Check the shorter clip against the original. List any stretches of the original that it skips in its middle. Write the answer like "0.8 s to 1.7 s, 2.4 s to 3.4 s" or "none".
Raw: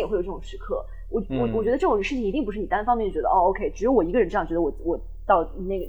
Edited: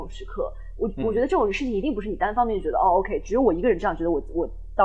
1.3 s to 1.5 s